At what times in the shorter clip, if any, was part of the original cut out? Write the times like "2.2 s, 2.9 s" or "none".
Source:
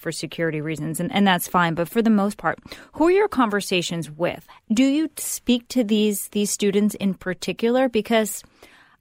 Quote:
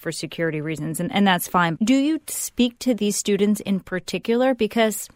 1.8 s, 3.0 s